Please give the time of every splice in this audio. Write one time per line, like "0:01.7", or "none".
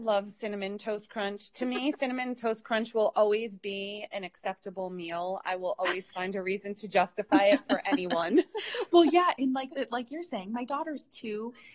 none